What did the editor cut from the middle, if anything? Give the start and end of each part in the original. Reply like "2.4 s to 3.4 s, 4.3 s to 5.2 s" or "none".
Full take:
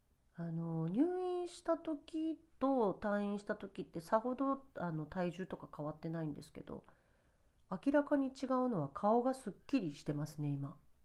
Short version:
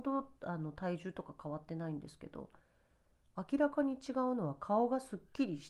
none